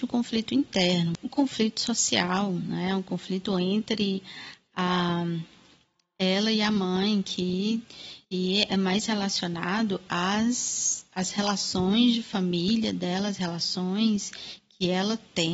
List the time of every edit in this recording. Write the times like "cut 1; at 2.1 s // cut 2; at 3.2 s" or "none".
cut 1; at 8.2 s